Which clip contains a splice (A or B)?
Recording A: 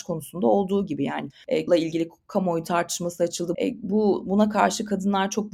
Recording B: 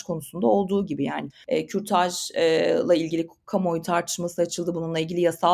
A